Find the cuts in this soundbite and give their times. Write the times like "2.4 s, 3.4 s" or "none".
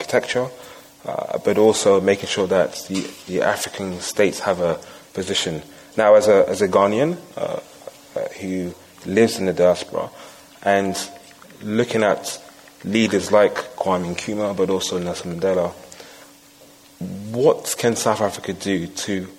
none